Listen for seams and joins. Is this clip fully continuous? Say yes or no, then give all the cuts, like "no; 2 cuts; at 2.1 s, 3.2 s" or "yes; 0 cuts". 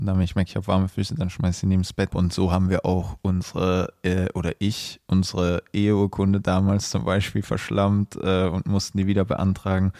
no; 1 cut; at 2.1 s